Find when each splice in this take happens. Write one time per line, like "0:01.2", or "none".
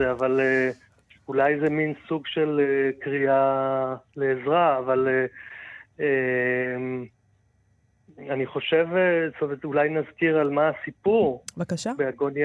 none